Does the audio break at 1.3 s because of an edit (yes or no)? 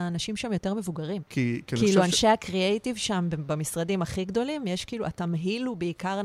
yes